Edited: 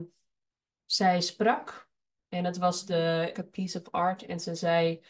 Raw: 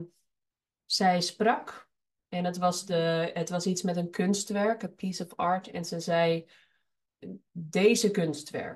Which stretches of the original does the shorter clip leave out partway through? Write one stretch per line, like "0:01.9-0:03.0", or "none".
0:03.3-0:04.8